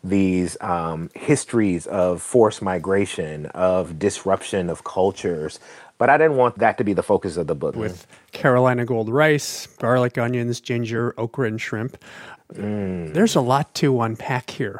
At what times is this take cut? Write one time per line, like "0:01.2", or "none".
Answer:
0:07.7
0:12.4